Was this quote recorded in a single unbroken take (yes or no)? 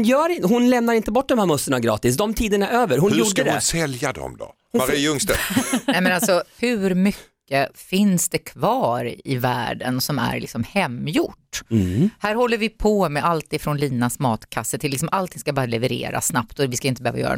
yes